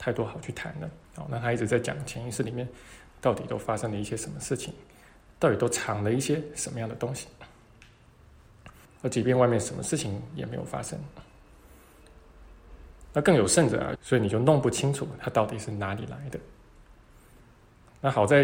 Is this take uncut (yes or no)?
no